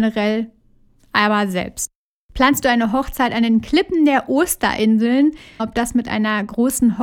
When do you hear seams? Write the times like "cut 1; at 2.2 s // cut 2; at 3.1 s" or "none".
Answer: cut 1; at 2.1 s // cut 2; at 5.6 s